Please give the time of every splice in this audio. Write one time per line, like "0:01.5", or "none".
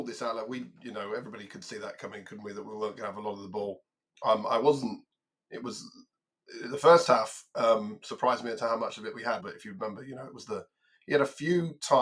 0:09.4